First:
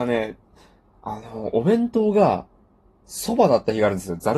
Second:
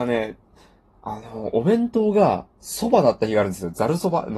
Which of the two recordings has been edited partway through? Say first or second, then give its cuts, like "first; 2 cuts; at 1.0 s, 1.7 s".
second; 1 cut; at 2.5 s